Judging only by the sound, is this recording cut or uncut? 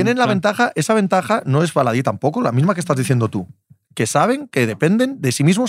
uncut